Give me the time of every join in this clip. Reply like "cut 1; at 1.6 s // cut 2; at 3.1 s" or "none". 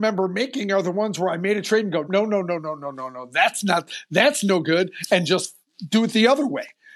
cut 1; at 2.0 s